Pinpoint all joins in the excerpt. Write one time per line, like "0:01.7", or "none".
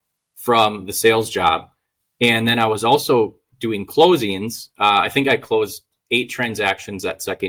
none